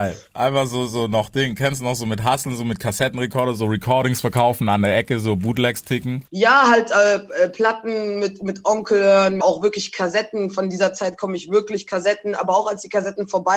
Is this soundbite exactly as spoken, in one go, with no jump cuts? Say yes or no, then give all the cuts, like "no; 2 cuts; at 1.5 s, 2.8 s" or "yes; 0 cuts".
no; 2 cuts; at 6.3 s, 9.4 s